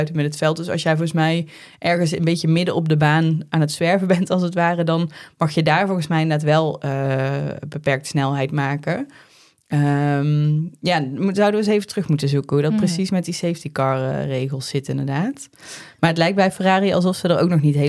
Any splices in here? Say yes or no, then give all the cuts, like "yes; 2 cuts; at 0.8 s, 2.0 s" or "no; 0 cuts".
no; 0 cuts